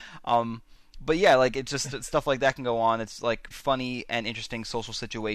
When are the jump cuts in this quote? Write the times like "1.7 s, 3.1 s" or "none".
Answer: 3.5 s

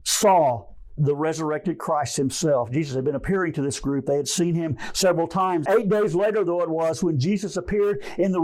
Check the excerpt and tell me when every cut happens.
1.0 s, 5.6 s

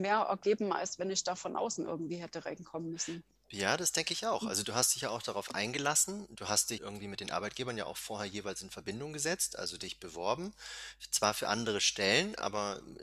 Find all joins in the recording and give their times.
6.8 s

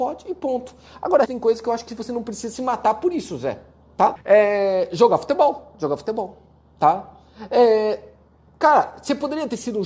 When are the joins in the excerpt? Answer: 1.3 s, 4.2 s

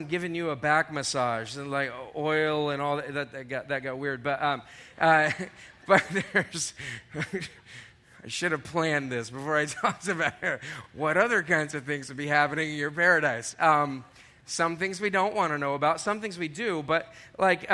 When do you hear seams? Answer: none

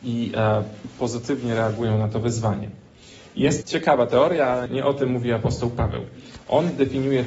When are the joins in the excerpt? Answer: 3.6 s, 4.7 s

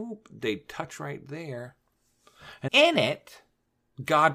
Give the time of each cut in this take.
2.7 s

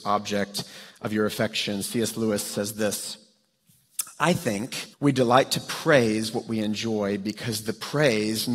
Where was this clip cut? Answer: 4.9 s

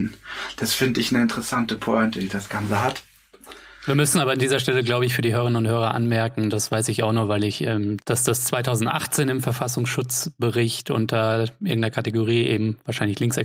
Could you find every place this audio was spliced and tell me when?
8.0 s

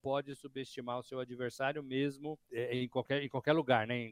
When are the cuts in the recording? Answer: 2.5 s

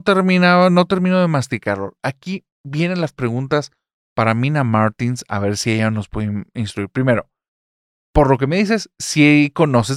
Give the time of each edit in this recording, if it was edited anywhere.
none

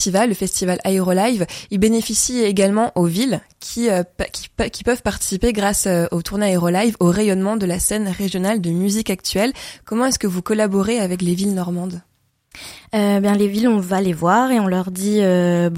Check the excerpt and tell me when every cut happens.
none

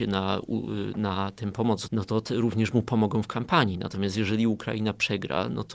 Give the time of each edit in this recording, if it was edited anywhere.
1.9 s

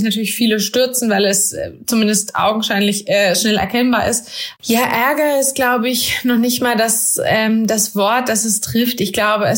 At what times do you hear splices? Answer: 4.6 s

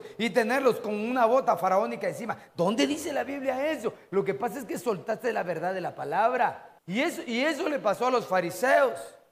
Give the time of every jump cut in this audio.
6.8 s

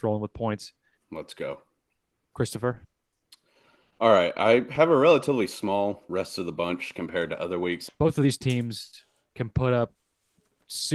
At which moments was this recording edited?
1.0 s, 7.9 s

